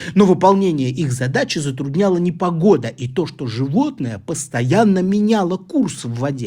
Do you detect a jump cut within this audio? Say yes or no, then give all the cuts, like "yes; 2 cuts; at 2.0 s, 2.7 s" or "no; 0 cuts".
no; 0 cuts